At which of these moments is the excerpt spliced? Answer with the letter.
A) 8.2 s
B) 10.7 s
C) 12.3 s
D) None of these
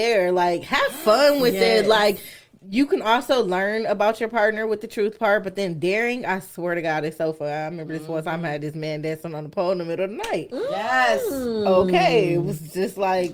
D